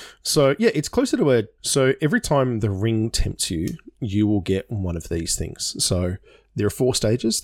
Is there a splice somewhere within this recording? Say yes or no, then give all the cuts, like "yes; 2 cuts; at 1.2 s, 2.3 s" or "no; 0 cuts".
yes; 1 cut; at 1.6 s